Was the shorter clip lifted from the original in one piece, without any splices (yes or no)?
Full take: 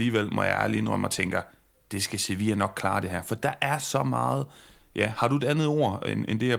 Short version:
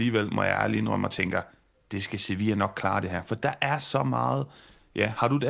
yes